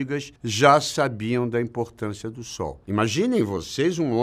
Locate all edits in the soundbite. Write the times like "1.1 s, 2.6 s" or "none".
2.8 s